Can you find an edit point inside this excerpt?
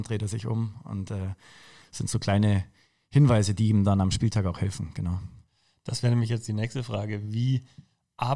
no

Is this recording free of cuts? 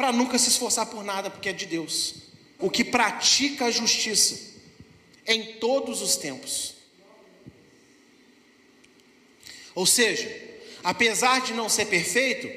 no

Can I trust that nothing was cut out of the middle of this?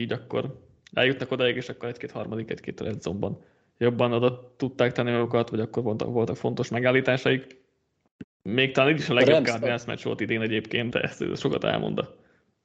no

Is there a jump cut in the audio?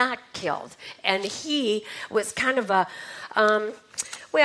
no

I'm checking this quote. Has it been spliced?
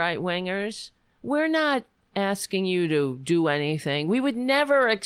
no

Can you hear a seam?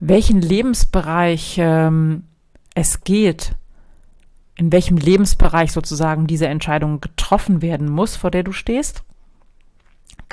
no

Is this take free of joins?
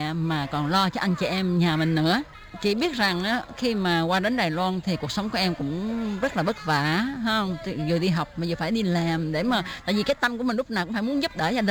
yes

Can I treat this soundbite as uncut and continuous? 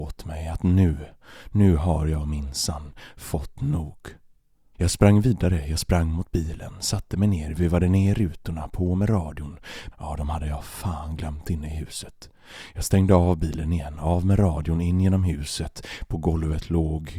no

